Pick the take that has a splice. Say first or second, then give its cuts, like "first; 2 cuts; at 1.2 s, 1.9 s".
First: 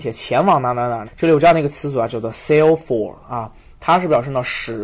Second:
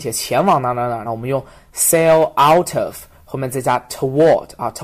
first; 1 cut; at 1.0 s